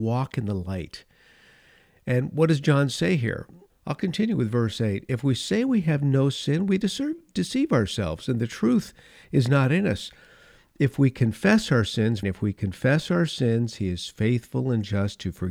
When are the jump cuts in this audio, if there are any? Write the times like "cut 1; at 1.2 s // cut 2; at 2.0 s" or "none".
cut 1; at 3.7 s // cut 2; at 12.2 s

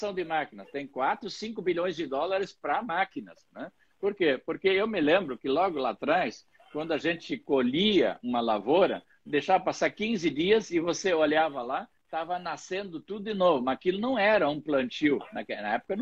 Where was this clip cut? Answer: cut 1; at 9.3 s

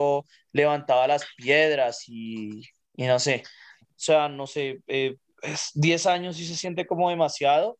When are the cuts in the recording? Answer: cut 1; at 3.8 s

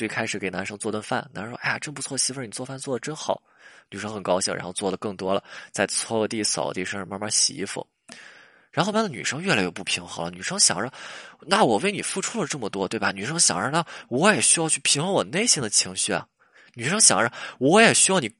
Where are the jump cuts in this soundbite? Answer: cut 1; at 8.9 s

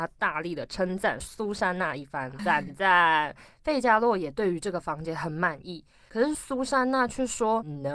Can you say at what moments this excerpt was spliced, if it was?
cut 1; at 2.4 s

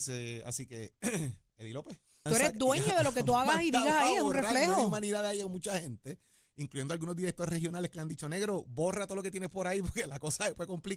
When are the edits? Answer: cut 1; at 2.3 s

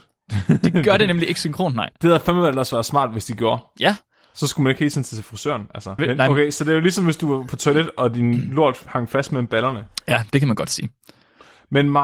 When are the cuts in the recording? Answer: cut 1; at 6.0 s

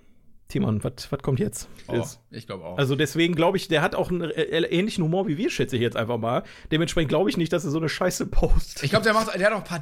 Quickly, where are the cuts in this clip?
cut 1; at 1.9 s

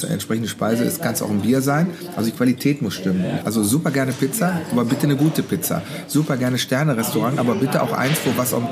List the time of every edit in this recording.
cut 1; at 3.4 s

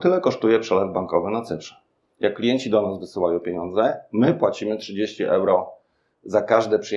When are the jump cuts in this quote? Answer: none

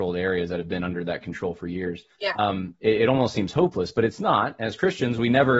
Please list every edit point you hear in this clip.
cut 1; at 2.1 s

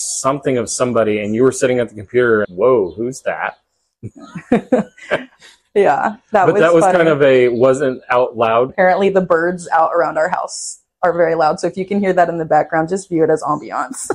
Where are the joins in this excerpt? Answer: cut 1; at 2.4 s // cut 2; at 8.7 s

